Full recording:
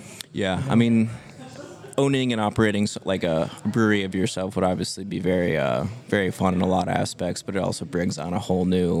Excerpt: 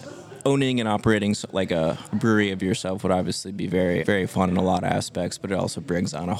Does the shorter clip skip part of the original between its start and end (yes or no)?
yes